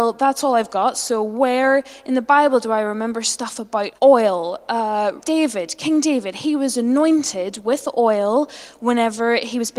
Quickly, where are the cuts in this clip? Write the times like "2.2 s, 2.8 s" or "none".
4.0 s, 5.2 s

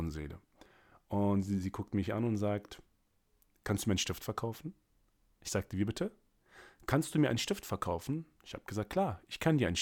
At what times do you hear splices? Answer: none

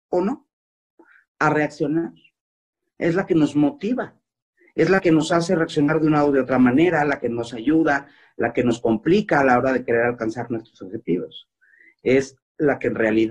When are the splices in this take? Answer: none

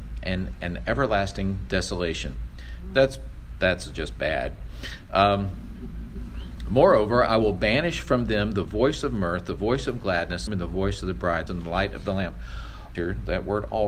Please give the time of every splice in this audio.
10.5 s, 11.5 s, 13.0 s

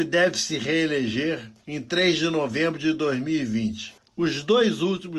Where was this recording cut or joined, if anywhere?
4.1 s

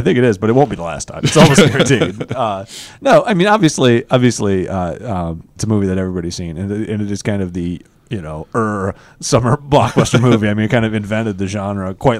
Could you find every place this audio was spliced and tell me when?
5.6 s

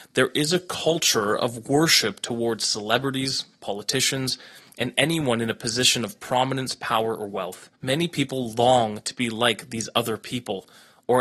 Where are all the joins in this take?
7.8 s

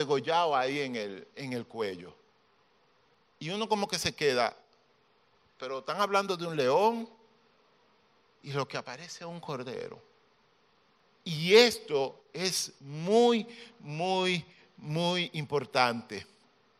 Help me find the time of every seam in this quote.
none

